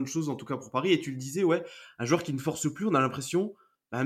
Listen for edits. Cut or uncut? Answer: uncut